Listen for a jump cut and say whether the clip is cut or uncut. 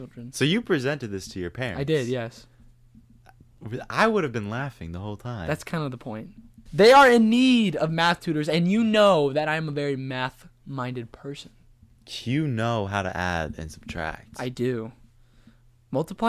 cut